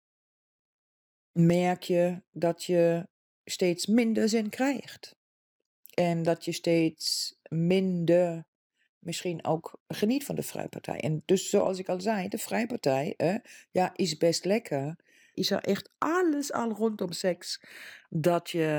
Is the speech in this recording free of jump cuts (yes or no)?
no